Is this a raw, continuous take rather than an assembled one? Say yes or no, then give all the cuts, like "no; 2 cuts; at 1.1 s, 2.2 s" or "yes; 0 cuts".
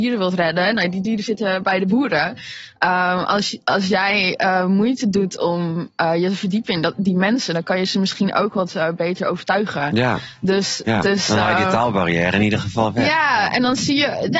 yes; 0 cuts